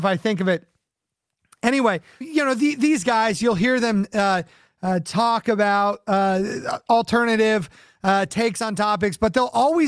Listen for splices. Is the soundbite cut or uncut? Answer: cut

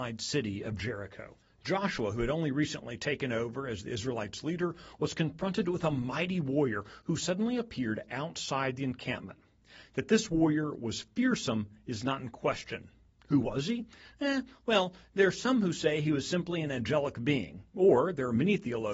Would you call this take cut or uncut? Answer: uncut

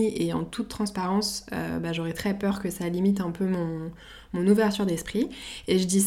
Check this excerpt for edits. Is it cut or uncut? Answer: uncut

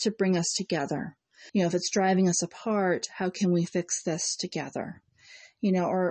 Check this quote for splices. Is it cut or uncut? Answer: cut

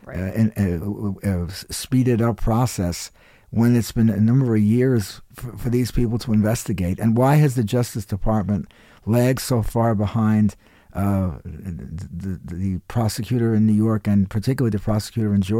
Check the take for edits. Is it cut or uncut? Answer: cut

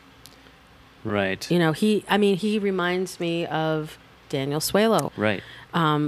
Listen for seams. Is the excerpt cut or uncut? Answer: cut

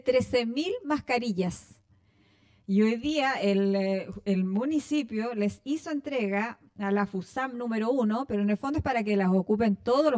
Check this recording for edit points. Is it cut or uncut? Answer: uncut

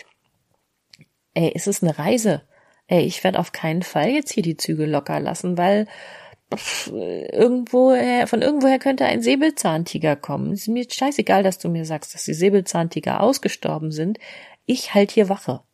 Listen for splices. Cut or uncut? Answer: uncut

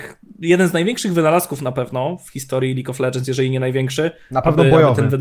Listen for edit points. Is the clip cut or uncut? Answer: uncut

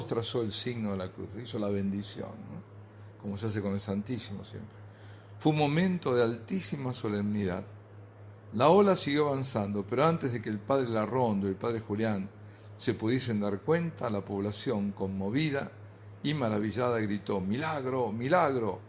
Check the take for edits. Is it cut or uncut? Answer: uncut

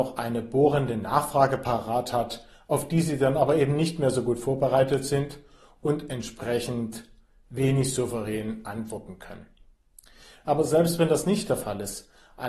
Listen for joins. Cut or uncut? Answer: uncut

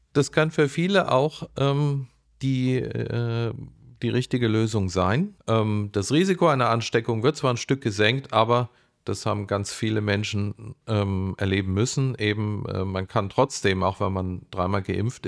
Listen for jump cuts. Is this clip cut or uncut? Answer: cut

